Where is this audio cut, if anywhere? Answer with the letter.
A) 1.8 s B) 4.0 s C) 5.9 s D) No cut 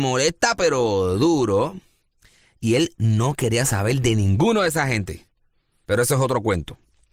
C